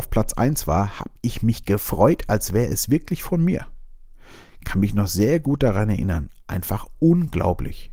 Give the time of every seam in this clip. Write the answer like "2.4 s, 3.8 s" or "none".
none